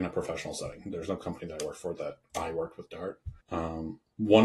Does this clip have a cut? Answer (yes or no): yes